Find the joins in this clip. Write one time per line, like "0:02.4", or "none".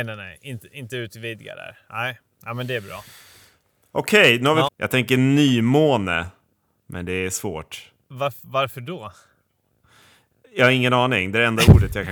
0:04.7